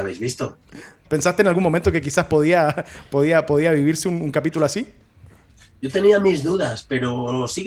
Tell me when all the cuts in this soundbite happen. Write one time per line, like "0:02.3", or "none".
0:01.1